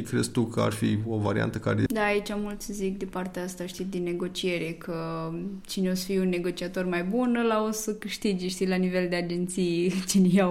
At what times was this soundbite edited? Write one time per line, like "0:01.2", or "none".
0:01.9

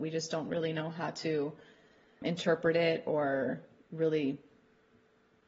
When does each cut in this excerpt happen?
0:02.2

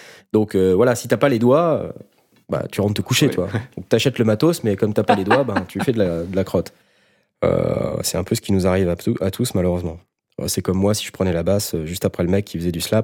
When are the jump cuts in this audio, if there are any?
none

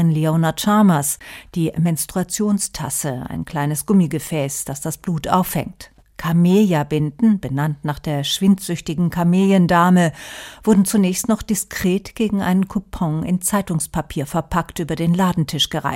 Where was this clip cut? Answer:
0:06.0

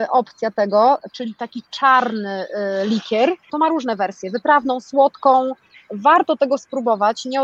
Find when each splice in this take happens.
0:01.1
0:03.5

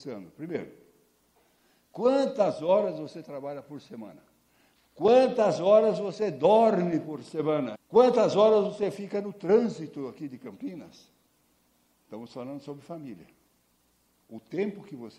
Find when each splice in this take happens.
0:04.7
0:07.7
0:11.9

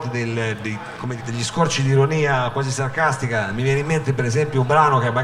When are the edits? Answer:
0:01.2

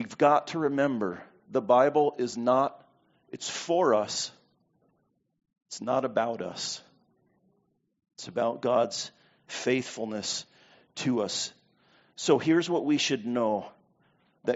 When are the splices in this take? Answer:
none

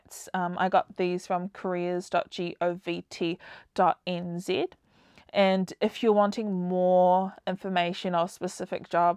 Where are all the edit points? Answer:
none

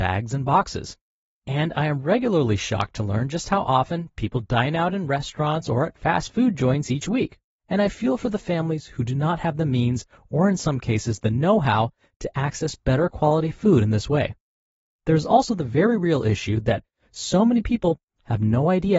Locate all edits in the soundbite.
0:07.6

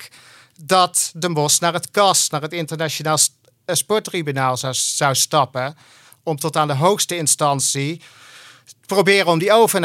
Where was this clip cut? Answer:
none

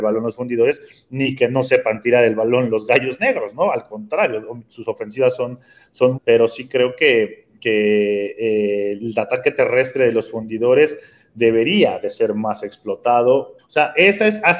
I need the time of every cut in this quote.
0:04.7
0:06.1
0:13.6

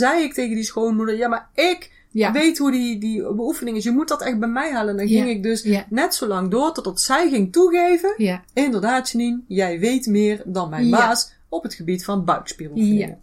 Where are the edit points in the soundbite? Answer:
none

